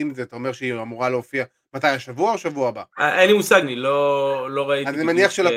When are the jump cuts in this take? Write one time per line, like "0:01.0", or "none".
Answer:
0:03.6